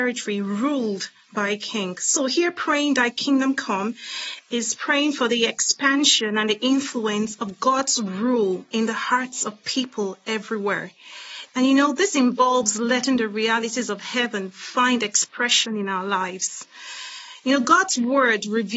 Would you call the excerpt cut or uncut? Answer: cut